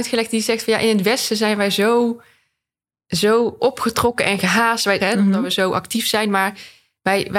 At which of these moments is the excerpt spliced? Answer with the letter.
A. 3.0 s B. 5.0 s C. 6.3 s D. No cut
B